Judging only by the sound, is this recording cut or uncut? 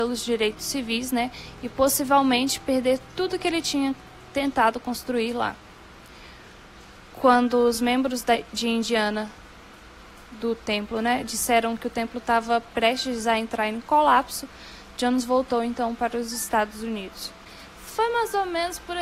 uncut